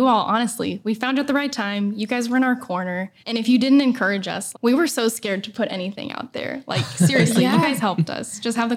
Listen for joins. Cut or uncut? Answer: cut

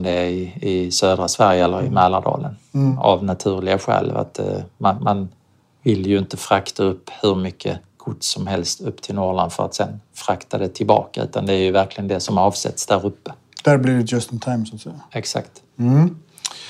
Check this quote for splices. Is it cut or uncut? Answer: uncut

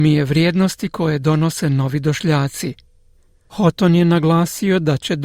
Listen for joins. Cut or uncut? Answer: uncut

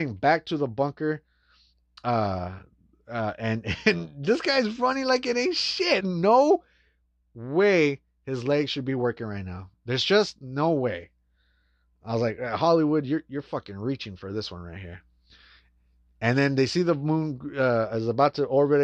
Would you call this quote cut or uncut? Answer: cut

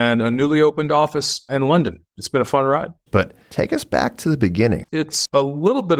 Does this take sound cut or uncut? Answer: cut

